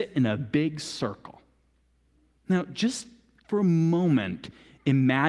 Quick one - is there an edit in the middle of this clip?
no; 0 cuts

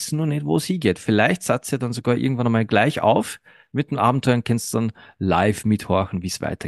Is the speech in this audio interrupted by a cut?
no; 0 cuts

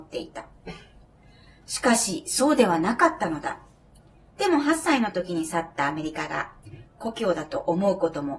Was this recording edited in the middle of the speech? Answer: no; 0 cuts

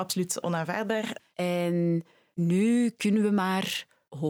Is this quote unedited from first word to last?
no; 1 cut; at 1.2 s

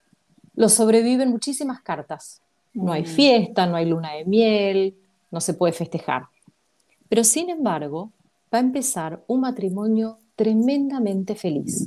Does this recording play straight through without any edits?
no; 1 cut; at 2.7 s

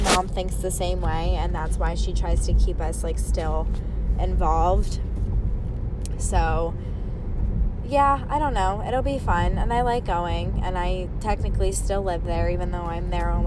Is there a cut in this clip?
no; 0 cuts

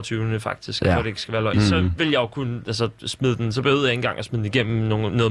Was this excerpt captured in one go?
no; 1 cut; at 1.5 s

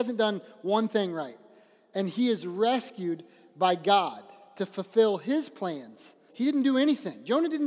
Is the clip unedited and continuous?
no; 1 cut; at 6.3 s

